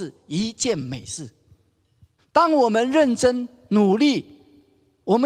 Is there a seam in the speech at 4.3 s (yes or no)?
no